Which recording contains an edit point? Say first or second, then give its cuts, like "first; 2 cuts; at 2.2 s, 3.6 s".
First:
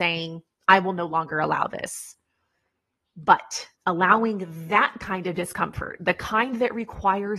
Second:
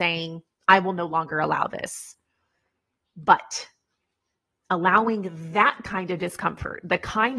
first; 1 cut; at 3.7 s